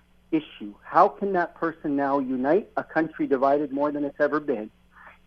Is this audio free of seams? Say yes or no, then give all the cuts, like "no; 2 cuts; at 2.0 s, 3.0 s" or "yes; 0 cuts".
yes; 0 cuts